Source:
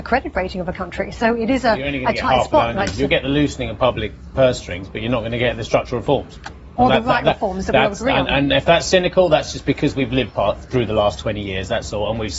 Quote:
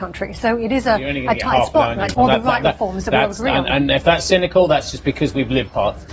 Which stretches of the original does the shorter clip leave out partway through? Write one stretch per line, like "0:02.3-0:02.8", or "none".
0:02.9-0:06.7